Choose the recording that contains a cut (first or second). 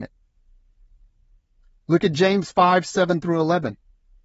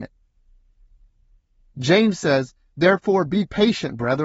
second